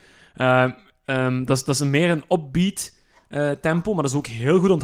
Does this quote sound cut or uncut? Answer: uncut